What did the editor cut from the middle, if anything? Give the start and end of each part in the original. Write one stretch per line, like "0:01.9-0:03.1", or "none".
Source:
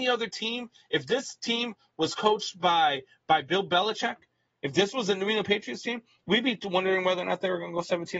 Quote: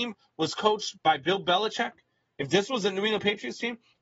0:02.5-0:03.2